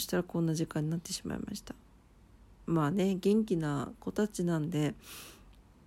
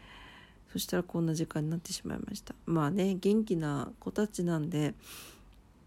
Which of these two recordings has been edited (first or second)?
second